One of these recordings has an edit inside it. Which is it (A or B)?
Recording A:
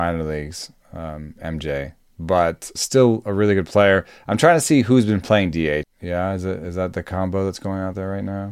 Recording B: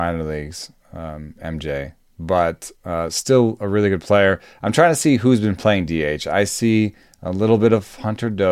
A